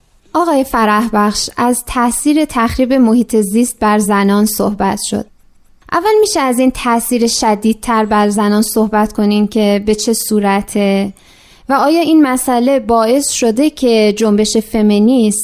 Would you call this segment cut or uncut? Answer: uncut